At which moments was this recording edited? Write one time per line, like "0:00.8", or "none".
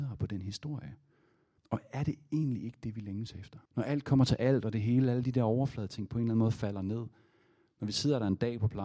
0:01.6
0:03.7